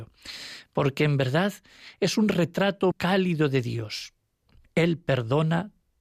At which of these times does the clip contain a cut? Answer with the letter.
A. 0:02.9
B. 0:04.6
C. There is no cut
A